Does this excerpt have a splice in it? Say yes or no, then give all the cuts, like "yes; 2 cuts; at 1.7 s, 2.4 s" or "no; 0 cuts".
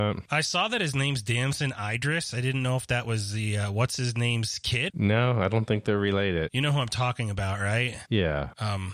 yes; 1 cut; at 4.9 s